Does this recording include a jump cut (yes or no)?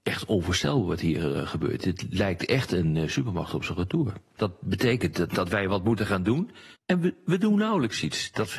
yes